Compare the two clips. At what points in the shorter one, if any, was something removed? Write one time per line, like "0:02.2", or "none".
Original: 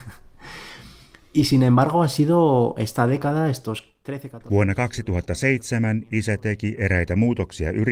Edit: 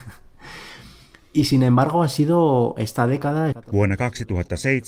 0:03.5